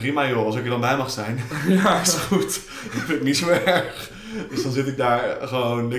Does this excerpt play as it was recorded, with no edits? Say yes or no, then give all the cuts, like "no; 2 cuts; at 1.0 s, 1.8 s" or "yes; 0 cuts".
yes; 0 cuts